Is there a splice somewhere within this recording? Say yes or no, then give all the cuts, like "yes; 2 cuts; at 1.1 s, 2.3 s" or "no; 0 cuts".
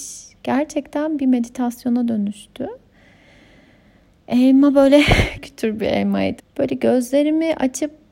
yes; 2 cuts; at 5.4 s, 6.4 s